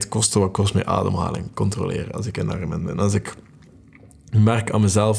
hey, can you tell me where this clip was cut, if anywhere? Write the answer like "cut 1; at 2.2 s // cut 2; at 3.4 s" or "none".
none